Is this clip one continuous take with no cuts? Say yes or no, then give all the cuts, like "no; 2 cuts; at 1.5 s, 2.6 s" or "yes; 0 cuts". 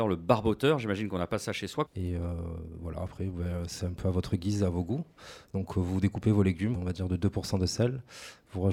no; 2 cuts; at 1.9 s, 6.7 s